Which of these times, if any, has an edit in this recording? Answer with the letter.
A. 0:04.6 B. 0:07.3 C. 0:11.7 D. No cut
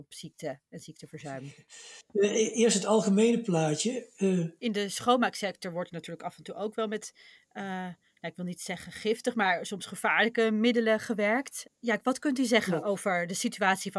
A